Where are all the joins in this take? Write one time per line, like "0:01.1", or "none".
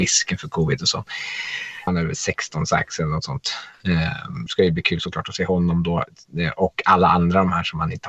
0:01.9
0:04.5